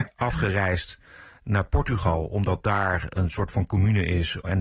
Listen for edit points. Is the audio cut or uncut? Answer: uncut